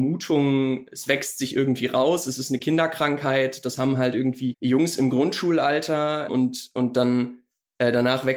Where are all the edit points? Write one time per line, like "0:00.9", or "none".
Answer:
0:04.5
0:06.3